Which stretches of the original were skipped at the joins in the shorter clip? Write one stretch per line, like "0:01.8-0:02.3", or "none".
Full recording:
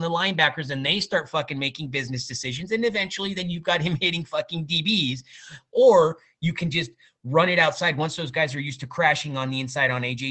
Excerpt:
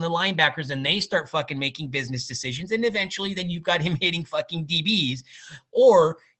none